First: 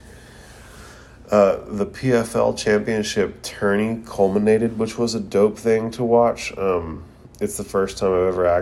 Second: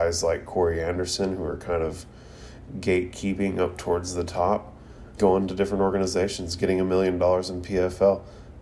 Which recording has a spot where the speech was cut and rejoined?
second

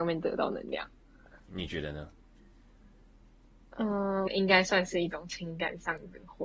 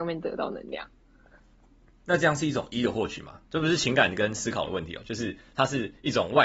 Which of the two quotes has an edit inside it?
first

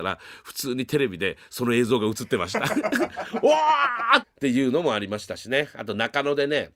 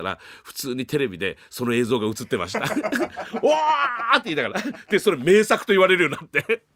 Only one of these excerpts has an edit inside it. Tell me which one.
first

